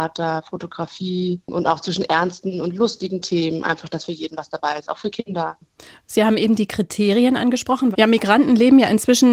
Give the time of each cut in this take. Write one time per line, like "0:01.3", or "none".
0:07.9